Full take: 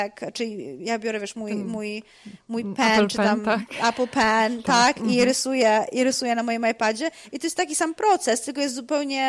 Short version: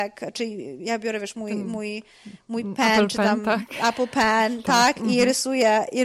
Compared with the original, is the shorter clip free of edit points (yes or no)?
yes